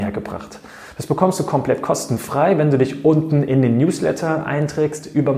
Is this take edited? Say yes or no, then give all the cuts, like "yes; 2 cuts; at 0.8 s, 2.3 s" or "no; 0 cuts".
no; 0 cuts